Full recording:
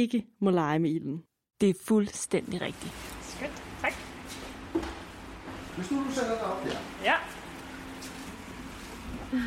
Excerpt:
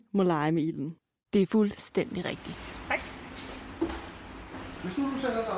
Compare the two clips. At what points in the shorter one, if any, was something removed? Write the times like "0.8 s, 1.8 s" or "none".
1.4 s, 2.8 s